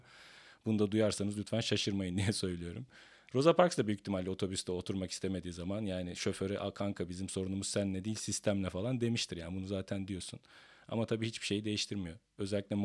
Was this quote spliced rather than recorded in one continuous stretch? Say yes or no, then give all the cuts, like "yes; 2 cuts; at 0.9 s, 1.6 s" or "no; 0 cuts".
no; 0 cuts